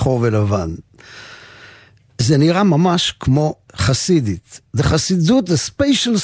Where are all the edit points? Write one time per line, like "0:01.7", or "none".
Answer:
0:03.7